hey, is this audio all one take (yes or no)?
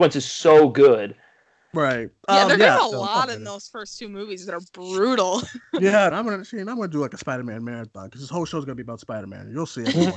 no